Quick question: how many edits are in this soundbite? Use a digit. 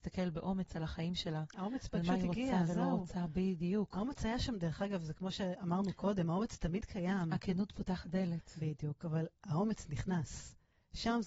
0